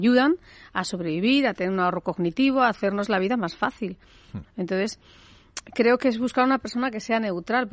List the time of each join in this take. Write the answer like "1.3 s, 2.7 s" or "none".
4.4 s